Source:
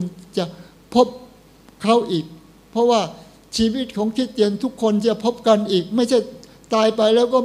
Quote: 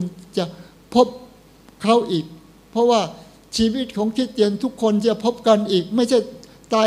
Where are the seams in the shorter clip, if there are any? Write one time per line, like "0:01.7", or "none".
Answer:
none